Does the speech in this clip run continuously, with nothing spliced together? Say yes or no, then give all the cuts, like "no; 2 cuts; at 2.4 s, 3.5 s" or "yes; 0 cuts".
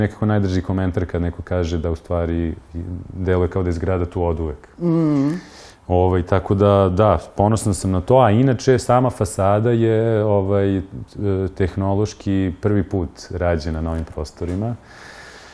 yes; 0 cuts